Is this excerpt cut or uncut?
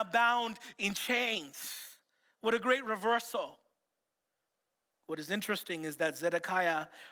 uncut